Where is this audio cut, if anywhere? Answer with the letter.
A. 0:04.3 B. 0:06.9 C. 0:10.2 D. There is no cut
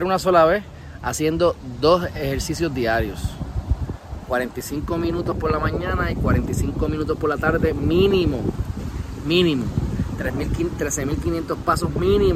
D